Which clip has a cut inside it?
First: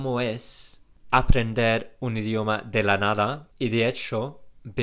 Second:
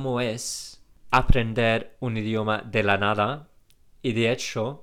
first; 1 cut; at 3.5 s

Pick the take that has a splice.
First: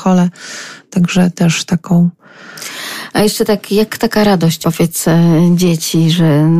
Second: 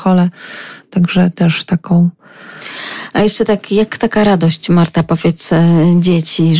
first; 1 cut; at 4.6 s

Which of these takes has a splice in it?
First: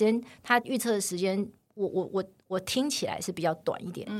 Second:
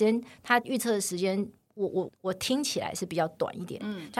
second; 1 cut; at 2.1 s

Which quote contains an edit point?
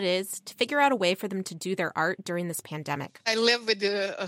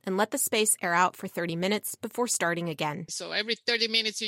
second; 1 cut; at 3.1 s

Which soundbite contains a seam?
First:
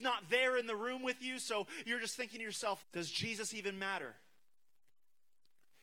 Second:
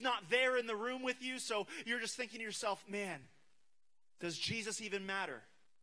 first; 1 cut; at 2.8 s

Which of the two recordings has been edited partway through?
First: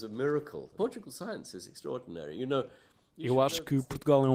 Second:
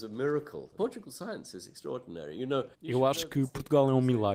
second; 1 cut; at 2.7 s

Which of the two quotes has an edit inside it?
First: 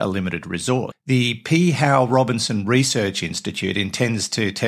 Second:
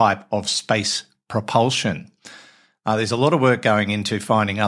first; 1 cut; at 0.9 s

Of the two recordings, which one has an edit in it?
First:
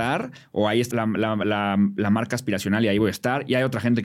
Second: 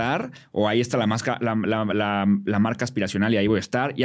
first; 1 cut; at 0.9 s

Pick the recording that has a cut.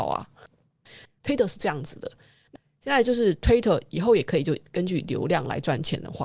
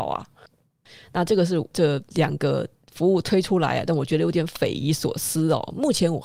first; 1 cut; at 1.0 s

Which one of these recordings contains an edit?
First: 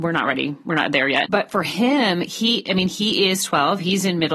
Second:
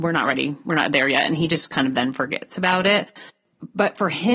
first; 1 cut; at 1.2 s

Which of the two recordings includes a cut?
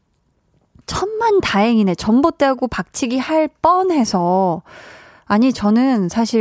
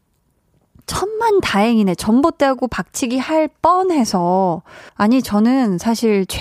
second; 1 cut; at 4.9 s

